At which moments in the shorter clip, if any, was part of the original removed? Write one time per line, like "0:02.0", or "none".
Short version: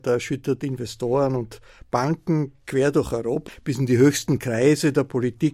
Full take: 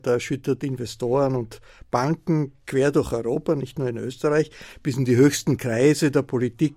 0:03.5